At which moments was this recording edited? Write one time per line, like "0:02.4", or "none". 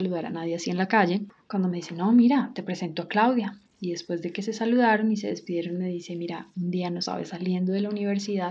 0:01.4